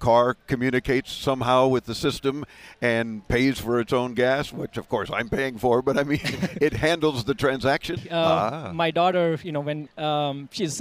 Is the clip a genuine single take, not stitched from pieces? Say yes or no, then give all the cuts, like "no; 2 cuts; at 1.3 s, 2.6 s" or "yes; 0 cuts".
no; 2 cuts; at 8.0 s, 9.9 s